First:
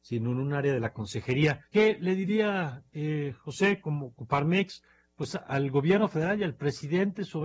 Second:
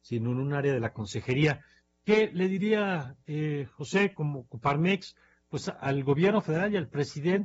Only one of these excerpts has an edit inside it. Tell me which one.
first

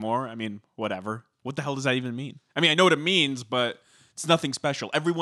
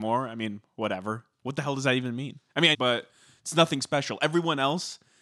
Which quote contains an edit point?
second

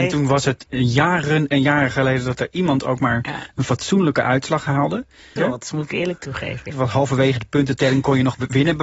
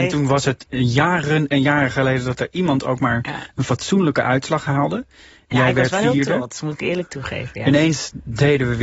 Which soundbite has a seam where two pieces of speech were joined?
first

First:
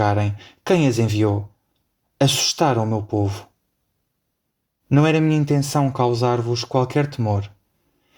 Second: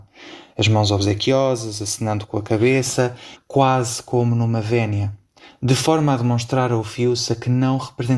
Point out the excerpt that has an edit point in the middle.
second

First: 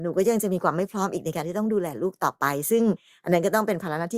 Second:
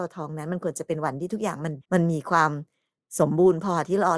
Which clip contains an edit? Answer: second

